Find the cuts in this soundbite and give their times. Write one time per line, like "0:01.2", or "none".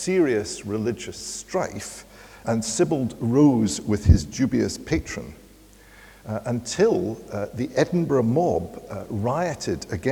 0:02.4